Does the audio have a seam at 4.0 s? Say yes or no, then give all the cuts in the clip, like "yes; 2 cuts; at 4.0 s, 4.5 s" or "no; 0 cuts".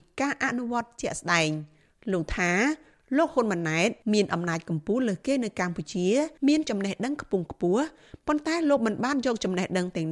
yes; 2 cuts; at 4.0 s, 6.4 s